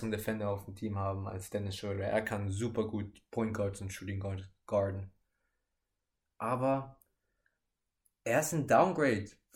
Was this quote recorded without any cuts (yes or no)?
yes